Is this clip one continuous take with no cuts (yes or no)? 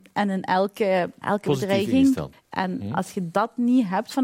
no